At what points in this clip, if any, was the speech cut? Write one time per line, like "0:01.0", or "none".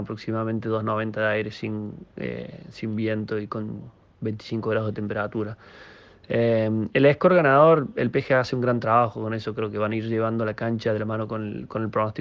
none